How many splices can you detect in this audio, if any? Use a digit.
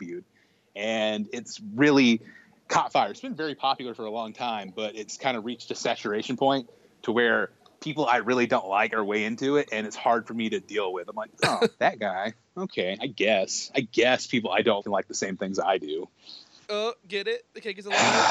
2